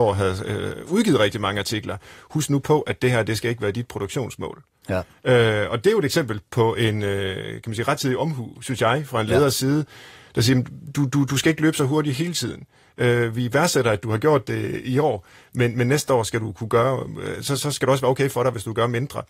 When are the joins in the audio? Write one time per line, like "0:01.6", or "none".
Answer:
0:04.8